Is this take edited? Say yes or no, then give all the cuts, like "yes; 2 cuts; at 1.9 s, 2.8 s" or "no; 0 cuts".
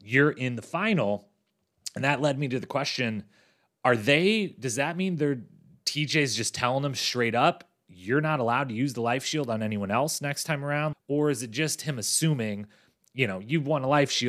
yes; 1 cut; at 10.9 s